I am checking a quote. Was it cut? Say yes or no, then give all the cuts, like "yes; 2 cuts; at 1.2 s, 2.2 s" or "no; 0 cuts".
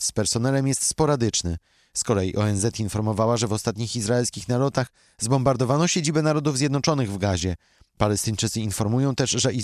no; 0 cuts